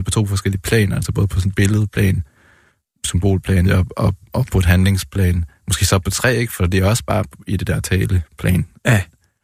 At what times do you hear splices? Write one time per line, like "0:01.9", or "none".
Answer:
0:03.6